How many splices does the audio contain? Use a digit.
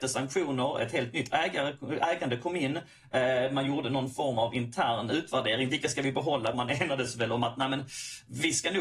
1